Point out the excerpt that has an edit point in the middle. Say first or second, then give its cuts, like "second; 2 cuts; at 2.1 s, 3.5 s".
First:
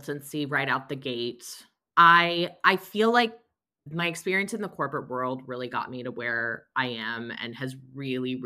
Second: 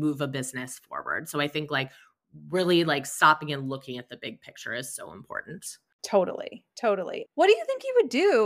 second; 1 cut; at 7.3 s